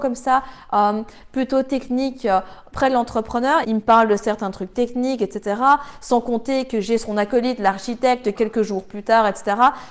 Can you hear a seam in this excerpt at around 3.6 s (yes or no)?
yes